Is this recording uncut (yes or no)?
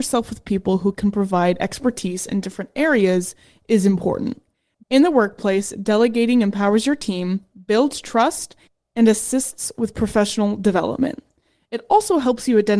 no